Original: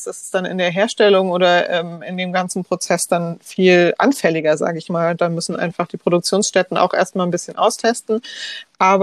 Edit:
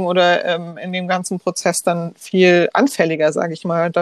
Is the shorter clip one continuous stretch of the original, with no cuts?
yes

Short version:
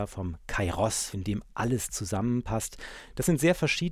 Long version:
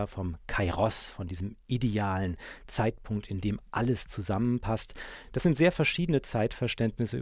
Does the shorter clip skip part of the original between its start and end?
yes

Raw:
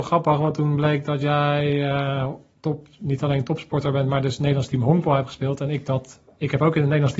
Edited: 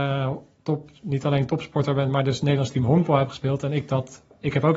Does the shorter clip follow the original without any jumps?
yes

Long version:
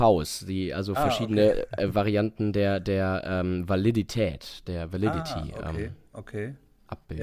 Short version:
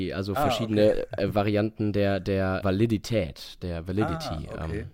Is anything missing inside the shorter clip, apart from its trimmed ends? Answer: yes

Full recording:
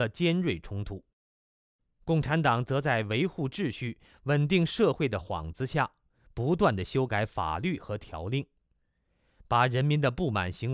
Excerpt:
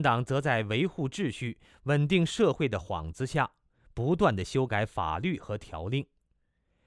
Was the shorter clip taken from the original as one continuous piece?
yes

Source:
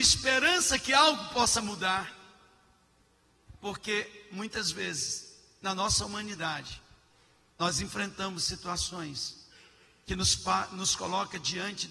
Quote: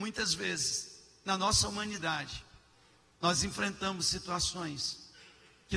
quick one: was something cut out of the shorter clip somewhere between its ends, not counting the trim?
no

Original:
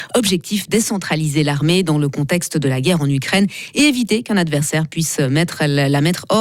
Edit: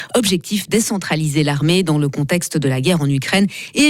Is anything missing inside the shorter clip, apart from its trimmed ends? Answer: no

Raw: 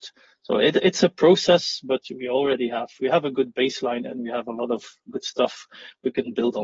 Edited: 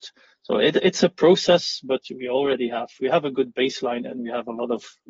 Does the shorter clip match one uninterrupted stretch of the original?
yes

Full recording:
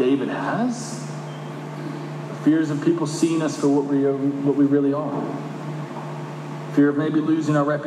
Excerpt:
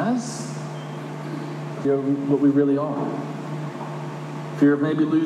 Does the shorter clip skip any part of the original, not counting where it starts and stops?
yes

